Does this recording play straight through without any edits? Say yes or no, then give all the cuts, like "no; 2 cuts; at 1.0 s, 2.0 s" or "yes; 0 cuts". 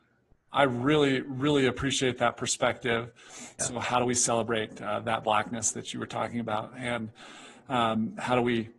no; 1 cut; at 3.6 s